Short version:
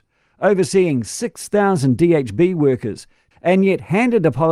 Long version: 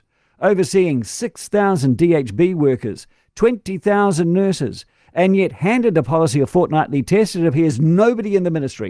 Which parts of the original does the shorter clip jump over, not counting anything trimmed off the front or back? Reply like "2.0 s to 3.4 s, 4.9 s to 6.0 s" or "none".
3.3 s to 5.0 s